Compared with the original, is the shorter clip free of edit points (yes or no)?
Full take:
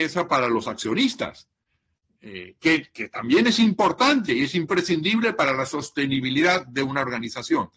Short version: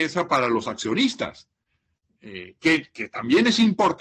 yes